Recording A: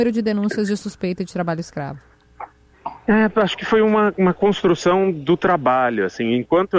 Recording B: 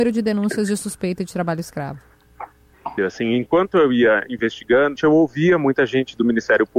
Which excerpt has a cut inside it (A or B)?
B